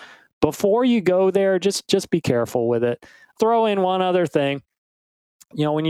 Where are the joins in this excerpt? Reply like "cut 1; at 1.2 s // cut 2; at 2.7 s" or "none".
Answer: cut 1; at 3.4 s